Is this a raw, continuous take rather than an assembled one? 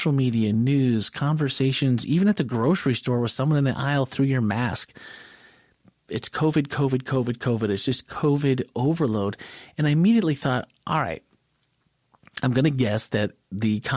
yes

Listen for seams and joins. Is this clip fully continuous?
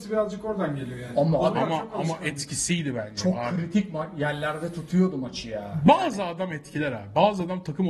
yes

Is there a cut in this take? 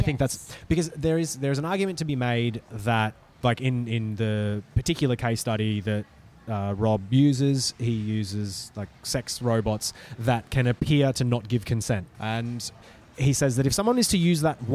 yes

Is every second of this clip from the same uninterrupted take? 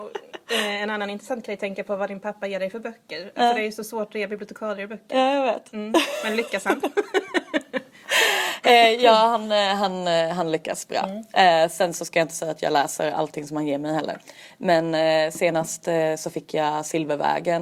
yes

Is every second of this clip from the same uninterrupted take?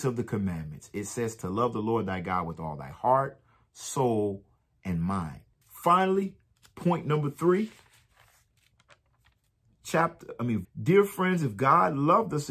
no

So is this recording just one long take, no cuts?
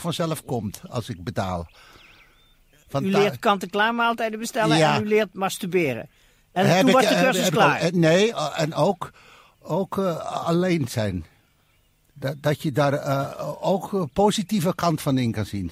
yes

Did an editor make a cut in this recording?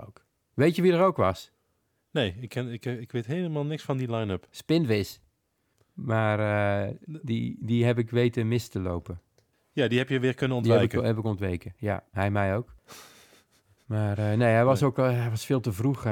no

